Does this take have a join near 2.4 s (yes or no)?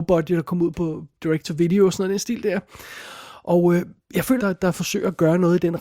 no